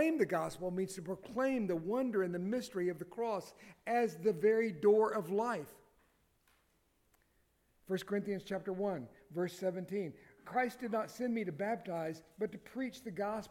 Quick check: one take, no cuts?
yes; 0 cuts

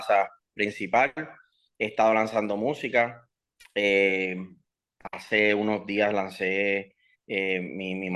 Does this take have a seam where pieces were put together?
no; 0 cuts

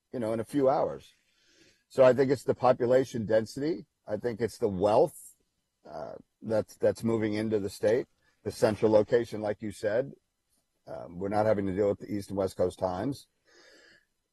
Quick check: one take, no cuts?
yes; 0 cuts

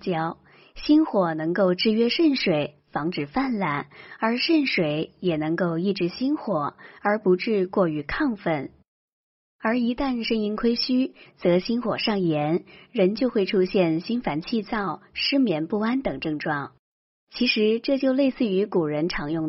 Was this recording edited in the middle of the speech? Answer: yes; 3 cuts; at 9.4 s, 11.2 s, 17.1 s

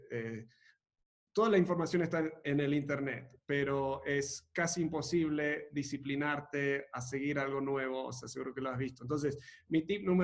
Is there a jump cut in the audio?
no; 0 cuts

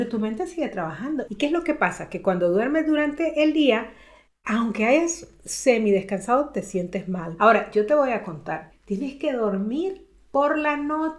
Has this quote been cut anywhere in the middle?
yes; 3 cuts; at 1.2 s, 7.4 s, 8.7 s

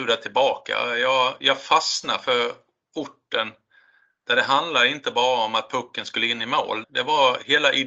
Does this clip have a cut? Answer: yes; 1 cut; at 6.8 s

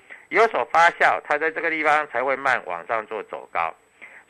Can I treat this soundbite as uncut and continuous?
no; 1 cut; at 2.4 s

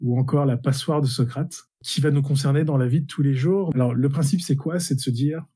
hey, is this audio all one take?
yes; 0 cuts

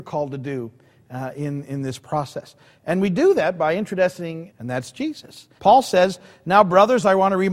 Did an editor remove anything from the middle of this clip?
yes; 2 cuts; at 4.5 s, 5.6 s

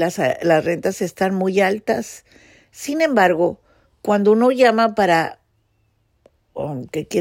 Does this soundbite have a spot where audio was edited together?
no; 0 cuts

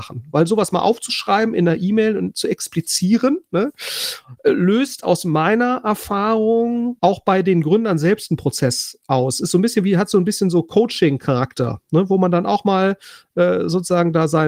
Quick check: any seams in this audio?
no; 0 cuts

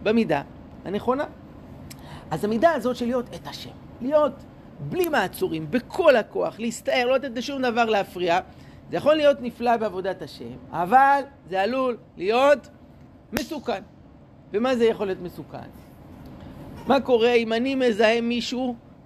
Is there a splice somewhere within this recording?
no; 0 cuts

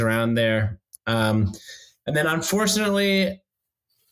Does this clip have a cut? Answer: no; 0 cuts

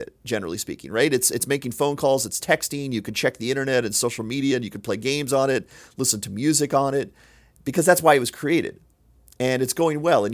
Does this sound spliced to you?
no; 0 cuts

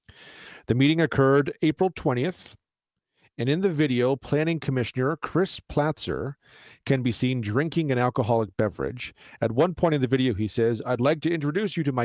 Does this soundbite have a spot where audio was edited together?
no; 0 cuts

